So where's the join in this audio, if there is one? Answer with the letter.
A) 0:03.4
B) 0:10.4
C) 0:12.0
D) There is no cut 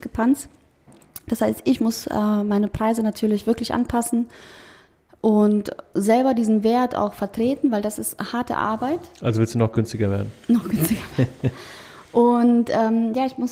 D